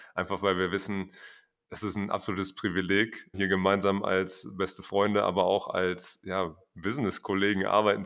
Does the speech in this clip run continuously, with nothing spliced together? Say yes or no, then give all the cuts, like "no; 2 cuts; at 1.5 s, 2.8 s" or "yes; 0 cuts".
no; 1 cut; at 3.3 s